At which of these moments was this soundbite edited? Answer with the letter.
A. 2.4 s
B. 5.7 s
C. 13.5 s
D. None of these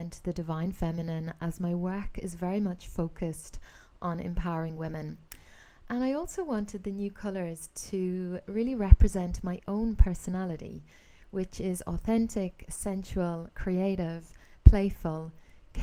C